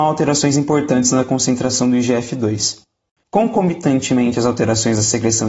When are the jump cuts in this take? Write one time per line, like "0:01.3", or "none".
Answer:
0:03.2